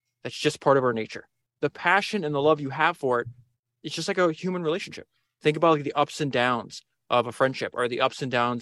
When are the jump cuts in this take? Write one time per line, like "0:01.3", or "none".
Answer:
0:01.4